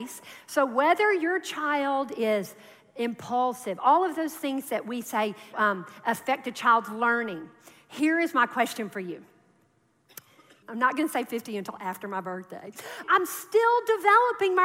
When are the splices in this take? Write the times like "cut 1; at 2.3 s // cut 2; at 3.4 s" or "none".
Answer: cut 1; at 5.5 s // cut 2; at 10.6 s // cut 3; at 13.0 s

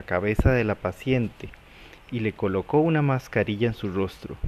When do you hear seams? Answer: none

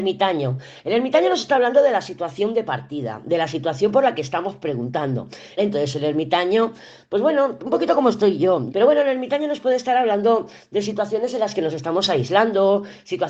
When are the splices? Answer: cut 1; at 5.6 s // cut 2; at 8.7 s

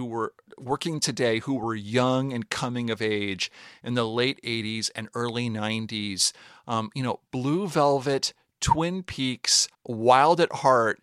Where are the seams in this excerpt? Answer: cut 1; at 9.7 s

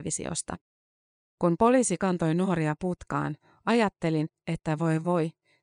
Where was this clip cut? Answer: none

